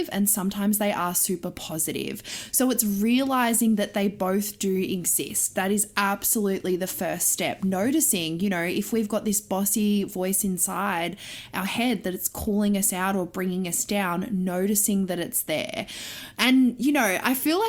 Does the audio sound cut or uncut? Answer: uncut